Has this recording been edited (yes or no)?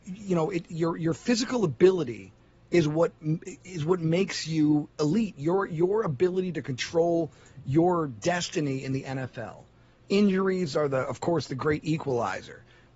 no